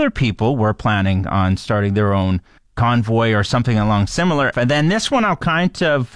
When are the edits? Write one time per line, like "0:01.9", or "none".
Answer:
0:04.5